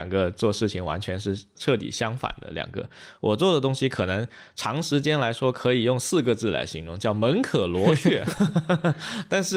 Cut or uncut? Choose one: uncut